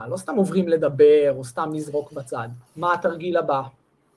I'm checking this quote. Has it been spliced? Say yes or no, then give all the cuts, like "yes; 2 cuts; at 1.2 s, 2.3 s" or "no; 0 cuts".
yes; 1 cut; at 2.7 s